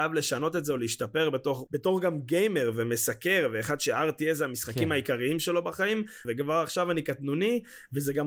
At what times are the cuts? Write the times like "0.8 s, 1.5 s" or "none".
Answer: 1.7 s, 6.2 s